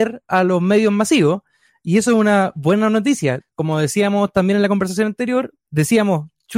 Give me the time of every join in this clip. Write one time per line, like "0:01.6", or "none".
0:03.4
0:05.6

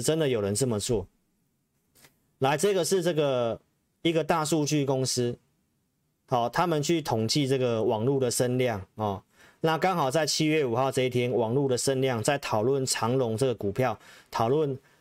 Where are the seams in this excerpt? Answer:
none

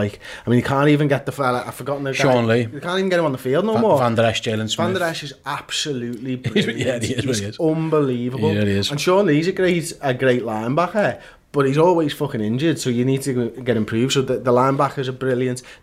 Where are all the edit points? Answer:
none

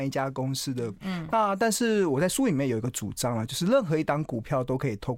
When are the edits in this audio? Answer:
0:01.0

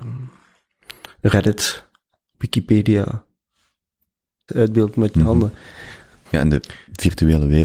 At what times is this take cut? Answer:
0:04.5
0:06.2

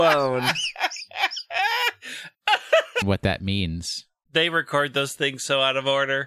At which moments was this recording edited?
0:03.0
0:04.3

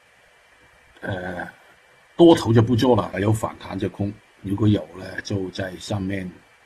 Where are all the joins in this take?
0:03.1
0:04.3

